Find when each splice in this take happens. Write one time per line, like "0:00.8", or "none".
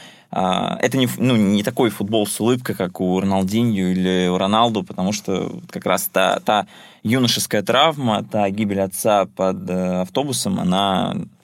none